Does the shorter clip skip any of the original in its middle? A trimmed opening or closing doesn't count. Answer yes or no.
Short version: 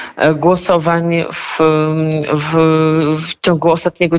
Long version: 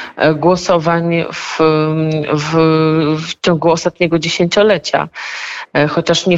no